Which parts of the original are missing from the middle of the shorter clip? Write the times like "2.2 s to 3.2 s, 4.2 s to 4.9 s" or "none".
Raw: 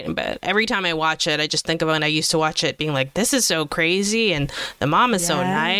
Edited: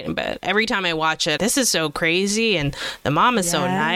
1.4 s to 3.1 s